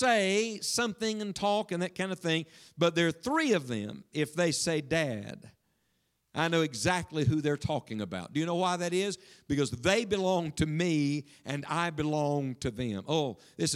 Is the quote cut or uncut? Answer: uncut